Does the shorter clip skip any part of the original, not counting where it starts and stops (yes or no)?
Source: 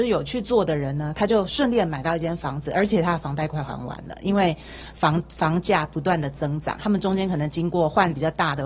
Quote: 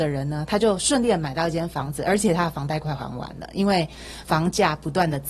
yes